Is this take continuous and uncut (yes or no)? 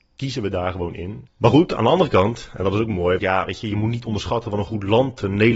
no